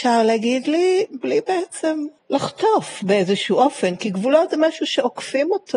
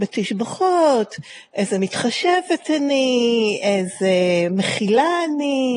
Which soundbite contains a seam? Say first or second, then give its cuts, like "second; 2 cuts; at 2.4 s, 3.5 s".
first; 1 cut; at 2.2 s